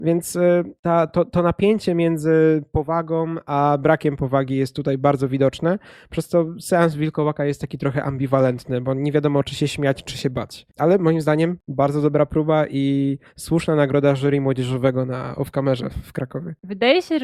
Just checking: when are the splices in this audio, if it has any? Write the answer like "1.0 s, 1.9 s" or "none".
none